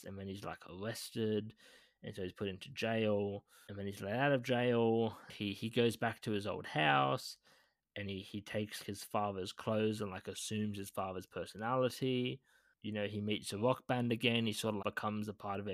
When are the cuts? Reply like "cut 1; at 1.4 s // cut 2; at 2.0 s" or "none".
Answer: cut 1; at 8.8 s // cut 2; at 14.8 s